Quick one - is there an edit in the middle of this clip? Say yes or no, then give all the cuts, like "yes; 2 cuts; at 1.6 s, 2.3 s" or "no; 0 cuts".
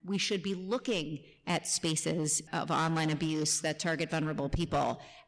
yes; 1 cut; at 2.5 s